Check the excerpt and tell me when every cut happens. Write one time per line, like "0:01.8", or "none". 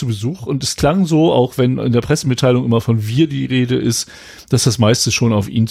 none